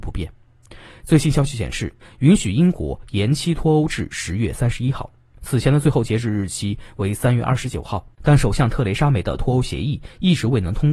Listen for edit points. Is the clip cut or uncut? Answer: cut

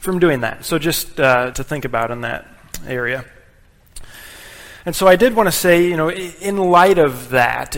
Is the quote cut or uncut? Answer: cut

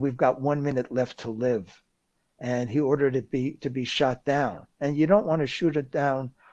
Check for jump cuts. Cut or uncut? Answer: uncut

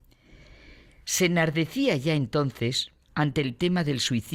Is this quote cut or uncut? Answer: cut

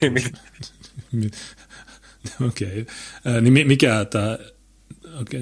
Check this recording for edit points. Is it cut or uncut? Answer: uncut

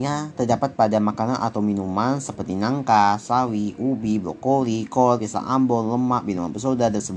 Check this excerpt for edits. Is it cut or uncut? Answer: uncut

